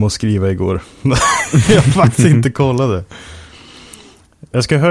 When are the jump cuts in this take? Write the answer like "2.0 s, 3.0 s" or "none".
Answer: none